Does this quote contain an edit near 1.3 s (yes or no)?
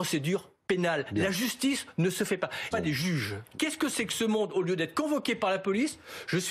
no